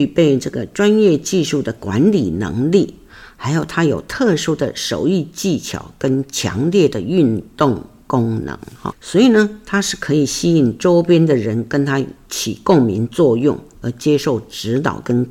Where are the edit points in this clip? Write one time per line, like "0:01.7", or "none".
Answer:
0:08.9